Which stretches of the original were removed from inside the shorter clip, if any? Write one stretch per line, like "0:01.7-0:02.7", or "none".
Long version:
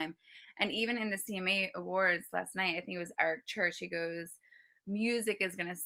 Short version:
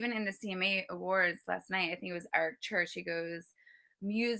none